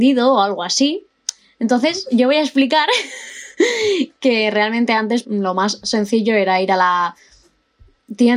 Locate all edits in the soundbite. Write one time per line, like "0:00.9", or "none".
0:05.2